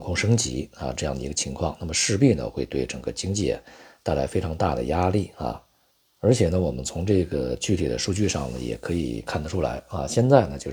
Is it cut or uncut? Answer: uncut